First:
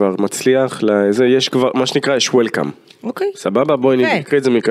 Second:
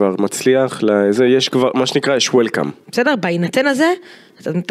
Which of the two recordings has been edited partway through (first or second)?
second